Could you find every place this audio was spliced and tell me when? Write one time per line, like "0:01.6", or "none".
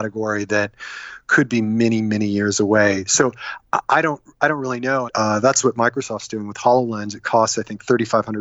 0:05.1